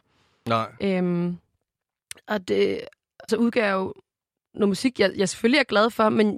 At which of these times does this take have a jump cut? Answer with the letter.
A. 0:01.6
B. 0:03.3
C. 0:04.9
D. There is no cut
B